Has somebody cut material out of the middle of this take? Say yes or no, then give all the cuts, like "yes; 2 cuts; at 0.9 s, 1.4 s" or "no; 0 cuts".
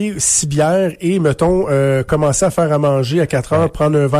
no; 0 cuts